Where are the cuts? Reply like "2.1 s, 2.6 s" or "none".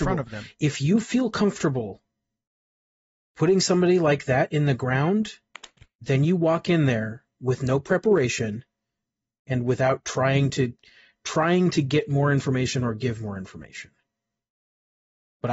none